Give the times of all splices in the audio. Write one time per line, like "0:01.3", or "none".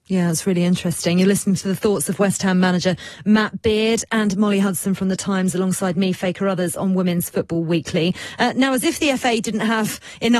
none